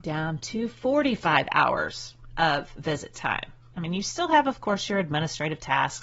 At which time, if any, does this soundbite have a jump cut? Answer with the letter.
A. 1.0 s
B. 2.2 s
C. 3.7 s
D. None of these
C